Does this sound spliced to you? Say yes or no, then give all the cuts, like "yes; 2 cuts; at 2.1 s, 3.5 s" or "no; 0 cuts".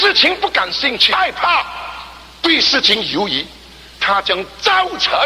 no; 0 cuts